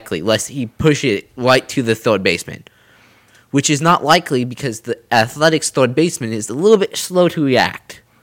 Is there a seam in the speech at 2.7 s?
no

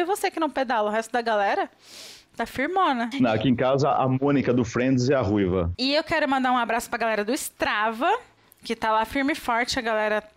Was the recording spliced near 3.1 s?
yes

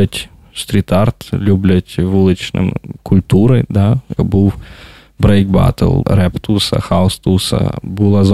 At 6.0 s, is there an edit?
yes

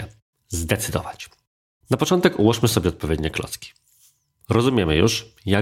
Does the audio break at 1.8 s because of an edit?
yes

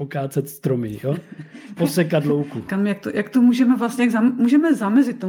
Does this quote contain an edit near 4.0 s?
no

